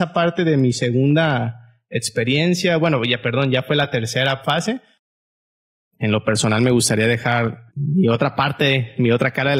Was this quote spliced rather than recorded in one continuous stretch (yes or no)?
yes